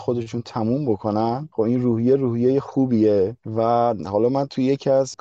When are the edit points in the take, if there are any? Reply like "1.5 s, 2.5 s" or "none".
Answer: none